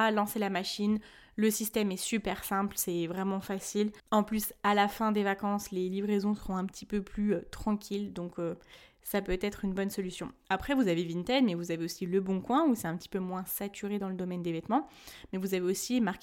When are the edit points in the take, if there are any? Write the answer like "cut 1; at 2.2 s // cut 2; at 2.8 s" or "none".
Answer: cut 1; at 4.0 s